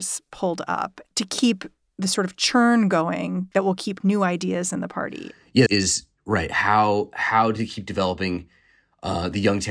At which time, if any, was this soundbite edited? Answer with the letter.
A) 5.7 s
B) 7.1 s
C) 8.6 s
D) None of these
A